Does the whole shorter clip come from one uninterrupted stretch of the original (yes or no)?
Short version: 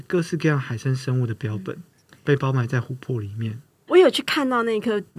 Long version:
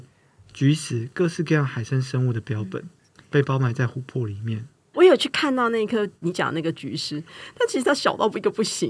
yes